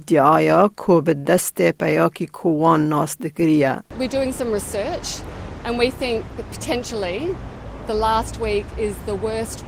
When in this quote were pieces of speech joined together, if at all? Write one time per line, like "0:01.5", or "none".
none